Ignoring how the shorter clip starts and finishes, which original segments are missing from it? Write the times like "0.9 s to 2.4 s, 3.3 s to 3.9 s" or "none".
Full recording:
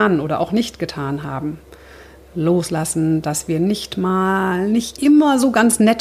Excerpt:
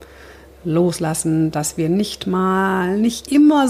none